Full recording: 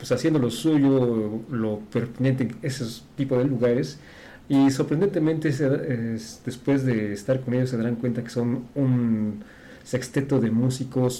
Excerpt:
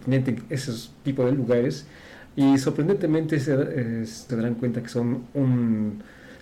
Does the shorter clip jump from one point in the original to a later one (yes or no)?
yes